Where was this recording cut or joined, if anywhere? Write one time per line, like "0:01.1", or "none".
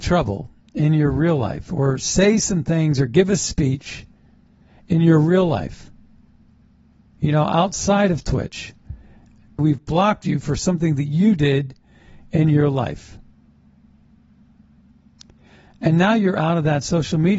0:09.6